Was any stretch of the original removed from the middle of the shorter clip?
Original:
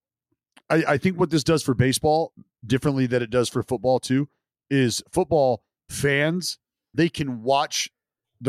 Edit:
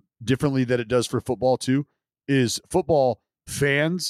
no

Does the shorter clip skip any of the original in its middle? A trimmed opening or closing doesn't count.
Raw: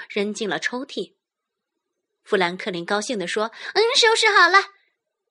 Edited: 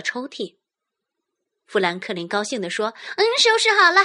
no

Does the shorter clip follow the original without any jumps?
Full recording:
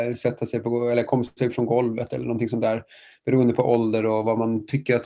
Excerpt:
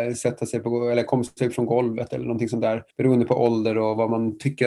no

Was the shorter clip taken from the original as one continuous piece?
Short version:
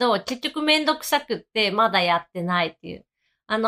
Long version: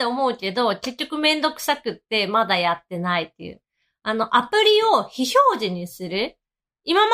yes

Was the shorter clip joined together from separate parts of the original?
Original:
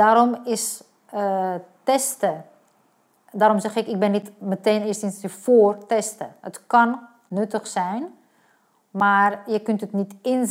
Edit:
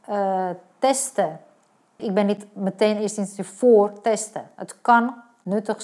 yes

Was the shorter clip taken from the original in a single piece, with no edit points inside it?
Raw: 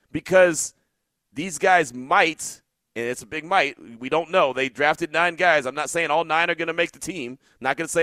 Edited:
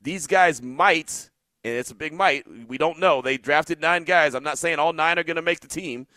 yes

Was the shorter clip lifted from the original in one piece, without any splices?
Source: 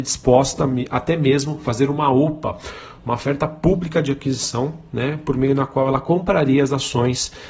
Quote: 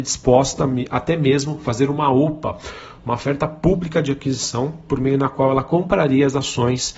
no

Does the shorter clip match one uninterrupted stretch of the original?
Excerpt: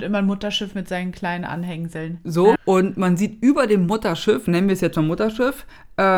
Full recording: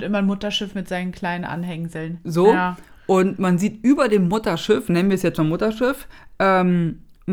no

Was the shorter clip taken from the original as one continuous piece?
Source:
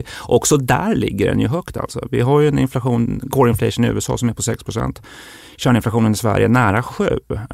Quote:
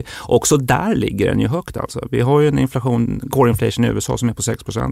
yes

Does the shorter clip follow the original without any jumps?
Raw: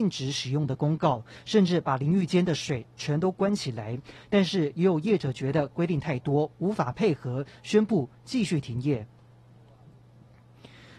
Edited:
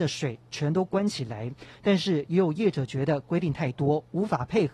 yes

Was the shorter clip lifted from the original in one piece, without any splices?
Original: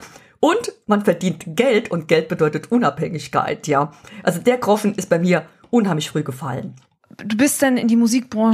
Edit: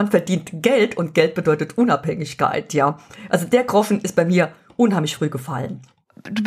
yes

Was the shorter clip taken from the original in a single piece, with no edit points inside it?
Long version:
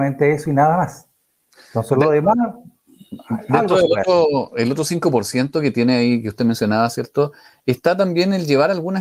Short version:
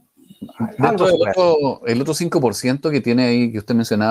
yes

